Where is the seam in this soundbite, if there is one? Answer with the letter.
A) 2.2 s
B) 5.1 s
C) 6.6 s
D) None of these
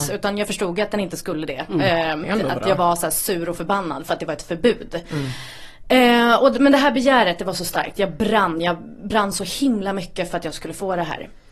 A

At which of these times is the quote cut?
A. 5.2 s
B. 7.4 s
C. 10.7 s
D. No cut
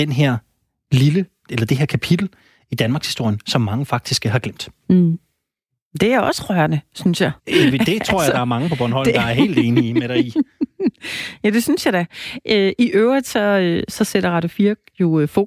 B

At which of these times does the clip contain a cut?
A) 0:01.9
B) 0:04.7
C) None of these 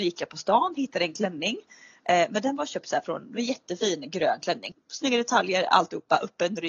B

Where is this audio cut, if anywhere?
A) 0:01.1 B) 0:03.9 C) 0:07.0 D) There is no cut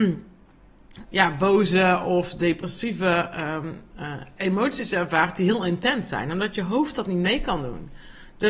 A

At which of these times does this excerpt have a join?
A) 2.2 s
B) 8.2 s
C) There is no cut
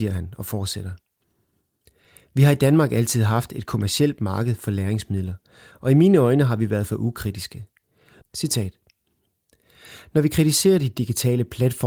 B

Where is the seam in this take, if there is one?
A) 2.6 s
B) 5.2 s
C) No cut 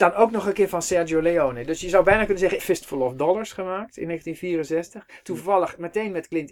A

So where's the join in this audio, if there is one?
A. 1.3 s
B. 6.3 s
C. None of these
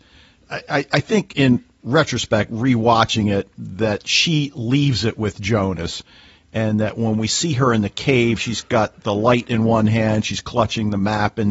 A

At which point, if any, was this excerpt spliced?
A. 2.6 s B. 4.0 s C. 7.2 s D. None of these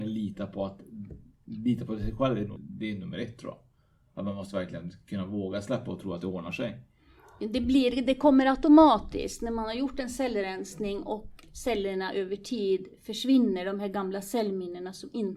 A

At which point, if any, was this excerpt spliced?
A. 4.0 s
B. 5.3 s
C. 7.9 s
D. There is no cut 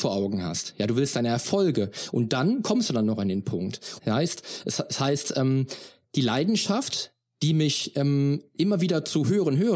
A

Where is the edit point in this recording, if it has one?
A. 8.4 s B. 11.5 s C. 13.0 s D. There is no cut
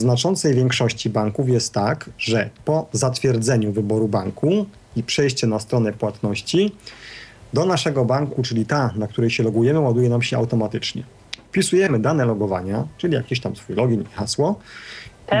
A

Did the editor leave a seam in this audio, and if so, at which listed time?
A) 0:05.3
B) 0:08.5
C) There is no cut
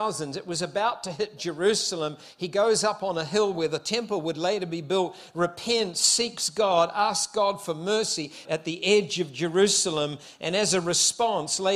B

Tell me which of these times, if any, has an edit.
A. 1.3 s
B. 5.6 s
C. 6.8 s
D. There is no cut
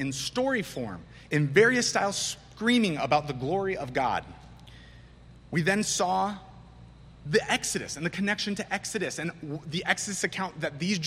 A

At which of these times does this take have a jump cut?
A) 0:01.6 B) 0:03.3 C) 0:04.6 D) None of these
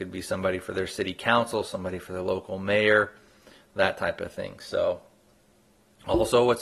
D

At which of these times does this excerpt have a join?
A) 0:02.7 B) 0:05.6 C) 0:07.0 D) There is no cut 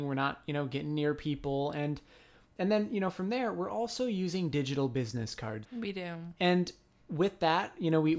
B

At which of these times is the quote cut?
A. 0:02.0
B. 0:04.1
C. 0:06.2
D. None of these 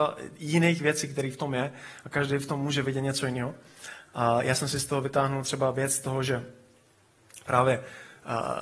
D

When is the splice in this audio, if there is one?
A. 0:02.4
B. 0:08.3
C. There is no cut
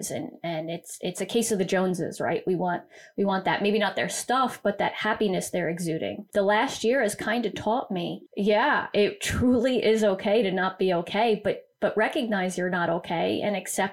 B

